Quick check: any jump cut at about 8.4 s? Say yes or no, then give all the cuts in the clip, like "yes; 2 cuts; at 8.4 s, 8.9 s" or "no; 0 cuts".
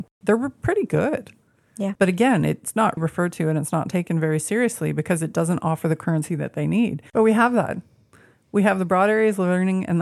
no; 3 cuts; at 2.0 s, 3.0 s, 7.1 s